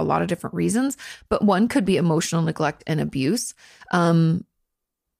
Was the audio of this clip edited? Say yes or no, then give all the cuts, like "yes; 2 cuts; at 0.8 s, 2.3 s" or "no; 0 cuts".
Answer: no; 0 cuts